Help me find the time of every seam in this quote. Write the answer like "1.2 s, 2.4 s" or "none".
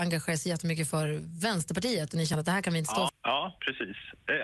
3.1 s